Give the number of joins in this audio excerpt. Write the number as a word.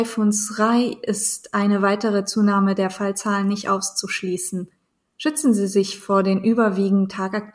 zero